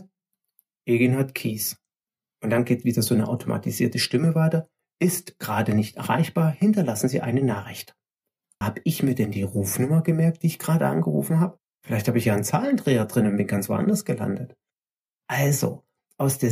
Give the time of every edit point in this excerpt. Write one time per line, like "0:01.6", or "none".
0:08.6

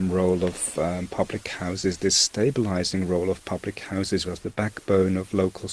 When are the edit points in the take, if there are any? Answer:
0:04.2

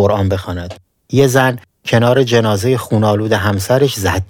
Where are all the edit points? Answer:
0:00.9

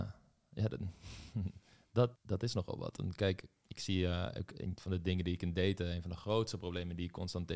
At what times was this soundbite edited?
0:02.1

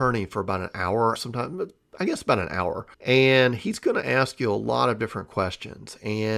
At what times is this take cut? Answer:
0:01.2
0:02.9

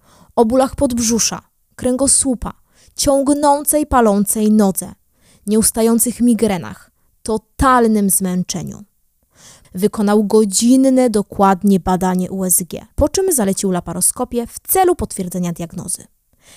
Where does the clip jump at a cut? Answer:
0:09.6
0:12.9

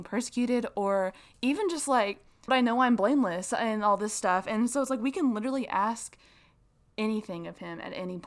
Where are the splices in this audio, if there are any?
0:02.5

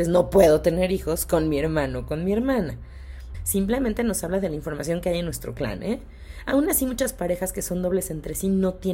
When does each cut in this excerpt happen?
0:03.3

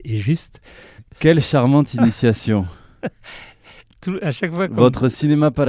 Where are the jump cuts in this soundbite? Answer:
0:01.0

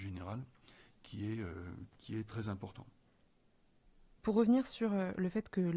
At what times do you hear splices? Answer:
none

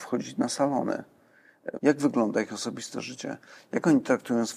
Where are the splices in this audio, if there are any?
0:01.8

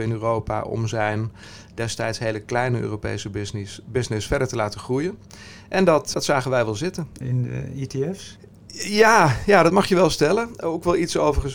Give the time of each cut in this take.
0:06.1
0:07.2

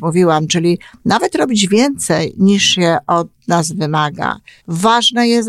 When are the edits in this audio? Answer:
0:04.6

